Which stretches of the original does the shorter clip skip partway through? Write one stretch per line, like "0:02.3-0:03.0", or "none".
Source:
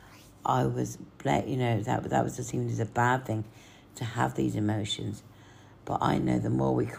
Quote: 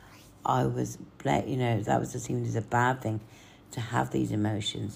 0:01.9-0:02.1